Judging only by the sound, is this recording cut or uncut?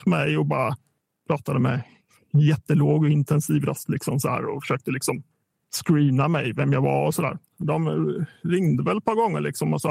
cut